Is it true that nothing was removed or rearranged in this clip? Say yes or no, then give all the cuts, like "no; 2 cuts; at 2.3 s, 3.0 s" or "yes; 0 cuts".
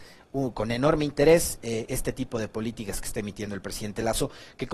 yes; 0 cuts